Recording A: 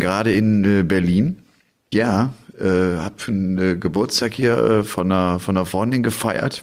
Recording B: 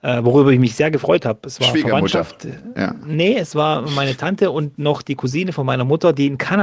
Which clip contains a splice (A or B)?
A